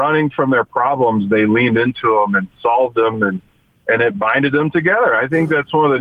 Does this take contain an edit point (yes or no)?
no